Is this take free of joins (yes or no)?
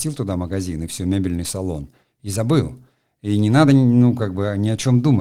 yes